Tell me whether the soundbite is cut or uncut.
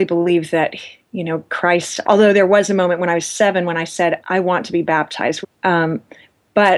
cut